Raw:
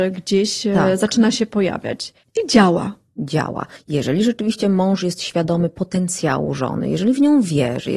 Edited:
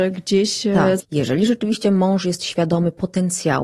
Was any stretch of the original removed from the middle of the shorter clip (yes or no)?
yes